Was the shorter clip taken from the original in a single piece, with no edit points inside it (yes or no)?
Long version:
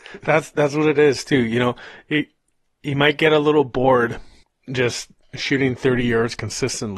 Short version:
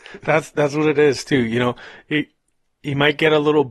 yes